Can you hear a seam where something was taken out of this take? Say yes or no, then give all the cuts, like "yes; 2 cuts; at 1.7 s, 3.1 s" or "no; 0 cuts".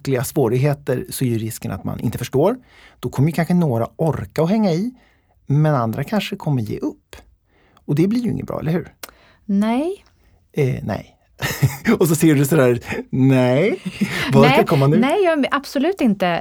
no; 0 cuts